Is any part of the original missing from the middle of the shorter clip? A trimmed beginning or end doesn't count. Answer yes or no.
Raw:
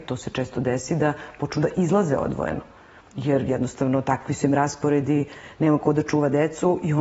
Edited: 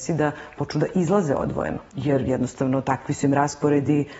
yes